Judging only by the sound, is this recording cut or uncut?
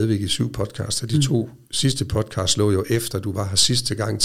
cut